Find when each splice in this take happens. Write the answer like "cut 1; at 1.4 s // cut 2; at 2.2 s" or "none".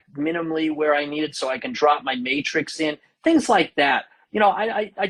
none